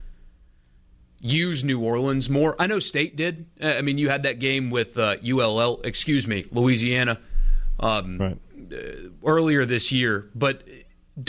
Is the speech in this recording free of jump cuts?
yes; 0 cuts

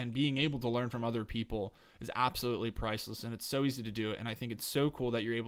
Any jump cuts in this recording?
no; 0 cuts

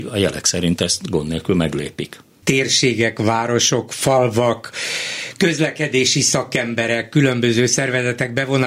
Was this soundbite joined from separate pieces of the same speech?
yes; 1 cut; at 2.4 s

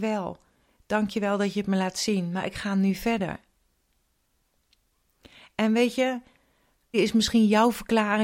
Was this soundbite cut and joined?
yes; 1 cut; at 6.9 s

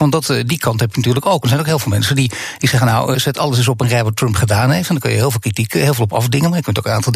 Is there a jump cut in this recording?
yes; 1 cut; at 3.1 s

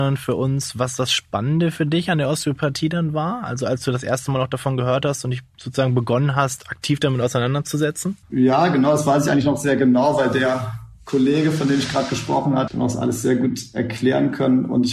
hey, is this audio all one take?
no; 2 cuts; at 8.2 s, 12.7 s

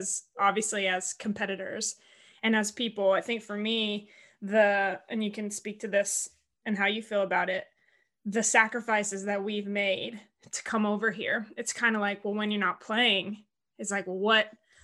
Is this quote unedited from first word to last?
yes; 0 cuts

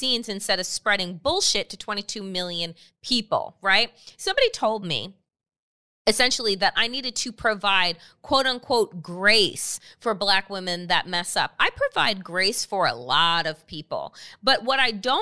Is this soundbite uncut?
yes; 0 cuts

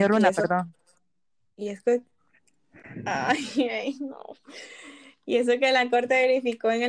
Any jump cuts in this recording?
no; 0 cuts

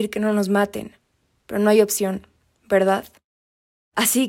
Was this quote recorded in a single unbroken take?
yes; 0 cuts

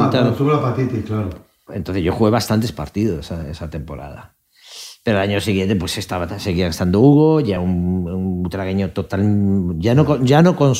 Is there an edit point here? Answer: no; 0 cuts

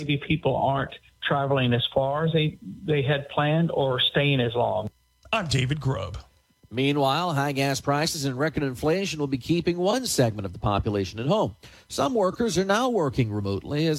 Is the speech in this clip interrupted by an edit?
no; 0 cuts

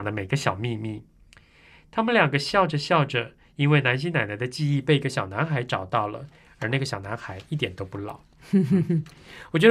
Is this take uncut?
yes; 0 cuts

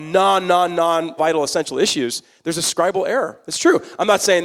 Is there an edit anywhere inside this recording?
yes; 1 cut; at 1.2 s

